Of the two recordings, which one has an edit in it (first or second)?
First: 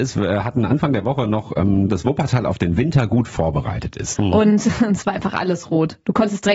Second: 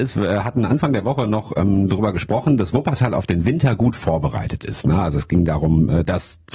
first